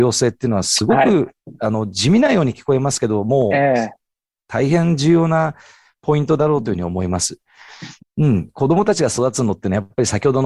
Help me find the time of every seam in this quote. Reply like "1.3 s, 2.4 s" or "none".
8.0 s